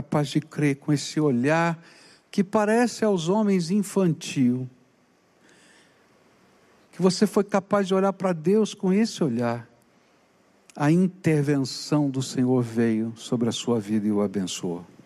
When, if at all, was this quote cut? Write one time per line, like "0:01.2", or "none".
none